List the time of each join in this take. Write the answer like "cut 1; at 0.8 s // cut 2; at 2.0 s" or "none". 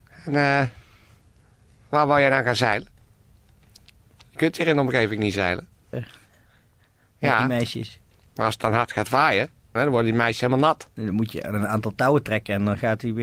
cut 1; at 5.9 s // cut 2; at 9.8 s